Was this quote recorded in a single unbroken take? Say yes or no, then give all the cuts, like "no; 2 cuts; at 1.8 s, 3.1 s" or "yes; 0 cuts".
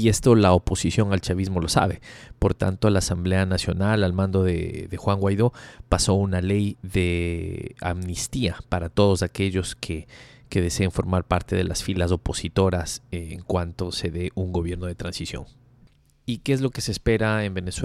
yes; 0 cuts